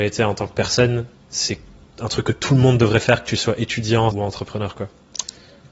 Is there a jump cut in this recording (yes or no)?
yes